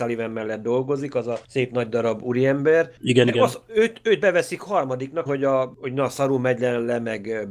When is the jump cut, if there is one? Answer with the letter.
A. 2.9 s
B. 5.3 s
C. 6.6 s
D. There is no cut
B